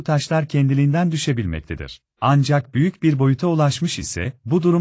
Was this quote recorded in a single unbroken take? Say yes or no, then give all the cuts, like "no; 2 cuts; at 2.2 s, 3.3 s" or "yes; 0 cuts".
no; 1 cut; at 2.1 s